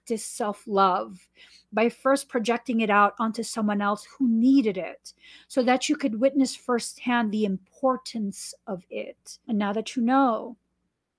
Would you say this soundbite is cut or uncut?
cut